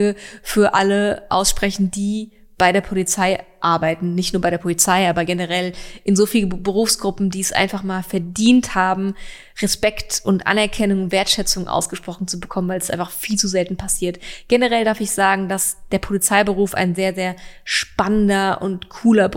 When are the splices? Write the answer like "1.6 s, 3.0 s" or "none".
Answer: none